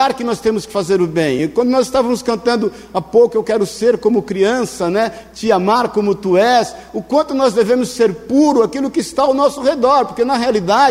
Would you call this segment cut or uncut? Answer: uncut